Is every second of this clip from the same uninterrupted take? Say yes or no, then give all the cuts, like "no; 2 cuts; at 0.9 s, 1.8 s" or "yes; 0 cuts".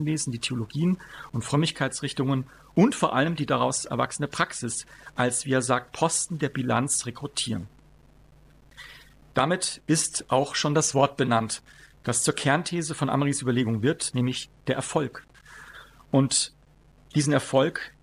yes; 0 cuts